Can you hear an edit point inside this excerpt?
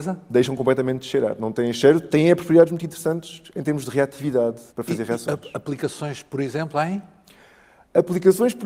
yes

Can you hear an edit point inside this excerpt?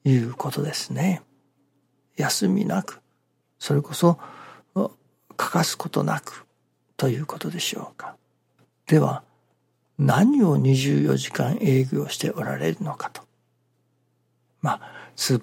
yes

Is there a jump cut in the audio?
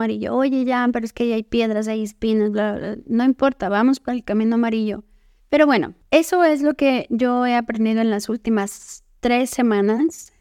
yes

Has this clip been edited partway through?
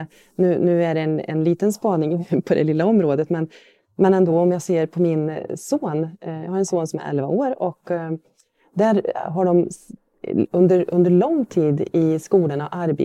no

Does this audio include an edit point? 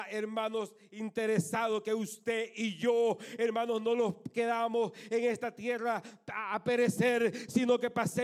no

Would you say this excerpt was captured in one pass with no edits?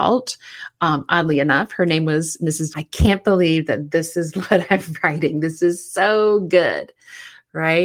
no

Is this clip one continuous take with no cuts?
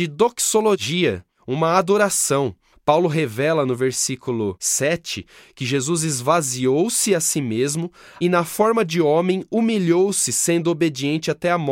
no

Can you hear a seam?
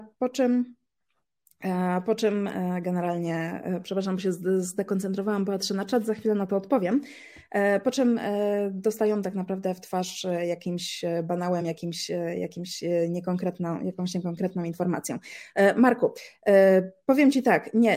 no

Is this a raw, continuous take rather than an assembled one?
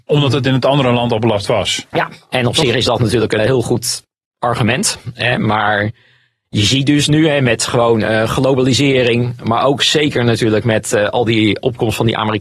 no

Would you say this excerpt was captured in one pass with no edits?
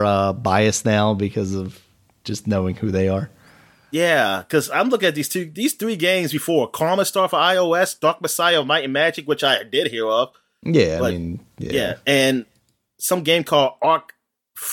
yes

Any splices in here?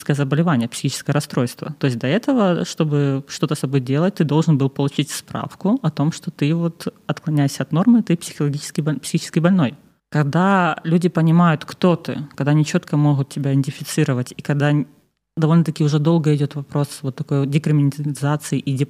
yes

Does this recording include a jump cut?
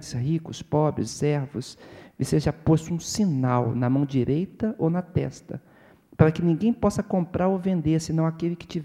yes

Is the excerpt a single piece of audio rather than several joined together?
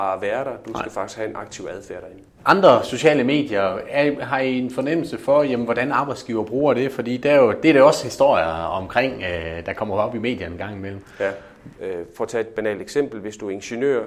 no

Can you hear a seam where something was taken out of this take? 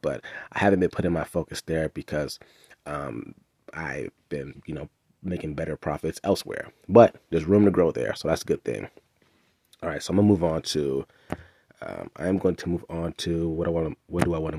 no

